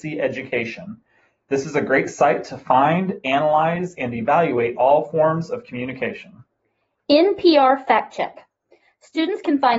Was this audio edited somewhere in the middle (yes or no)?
no